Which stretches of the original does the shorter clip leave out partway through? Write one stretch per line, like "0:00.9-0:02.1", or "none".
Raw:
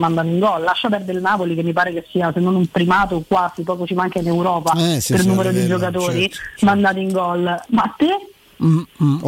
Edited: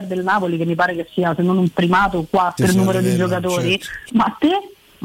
0:03.5-0:05.1
0:06.6-0:07.7